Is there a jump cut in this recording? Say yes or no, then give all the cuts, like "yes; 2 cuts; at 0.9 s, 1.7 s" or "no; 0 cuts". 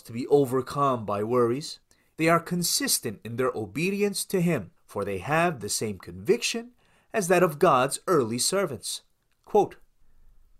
yes; 2 cuts; at 2.1 s, 4.8 s